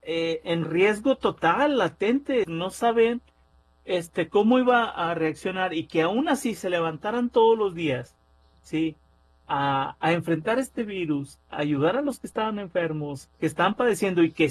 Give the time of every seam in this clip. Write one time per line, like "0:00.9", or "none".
0:02.4
0:13.3

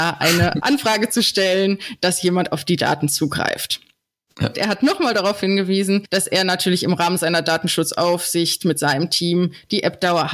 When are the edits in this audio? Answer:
0:04.5

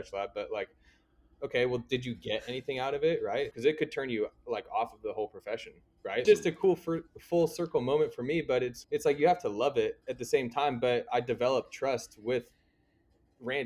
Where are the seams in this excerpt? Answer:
0:03.5
0:06.2
0:08.8

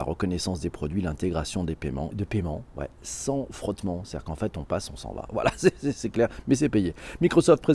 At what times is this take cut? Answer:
0:02.1

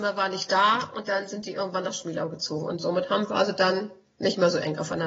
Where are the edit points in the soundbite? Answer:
none

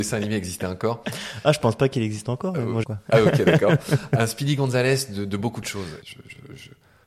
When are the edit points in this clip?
0:02.8
0:06.0

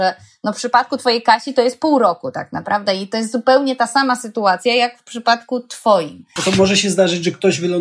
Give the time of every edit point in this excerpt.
0:06.4

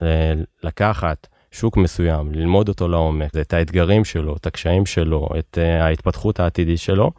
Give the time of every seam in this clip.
0:03.3

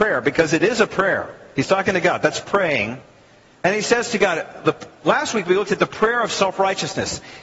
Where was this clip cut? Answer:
none

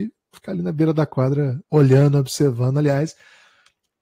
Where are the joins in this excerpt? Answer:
0:01.6

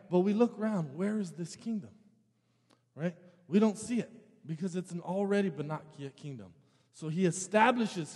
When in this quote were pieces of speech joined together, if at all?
none

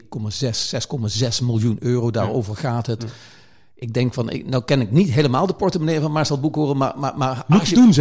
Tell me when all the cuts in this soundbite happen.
none

